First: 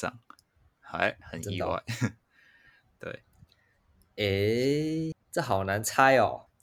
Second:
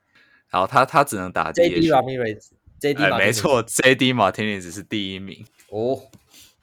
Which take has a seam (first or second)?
first